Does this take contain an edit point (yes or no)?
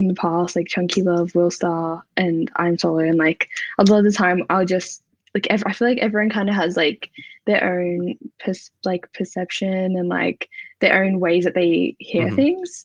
no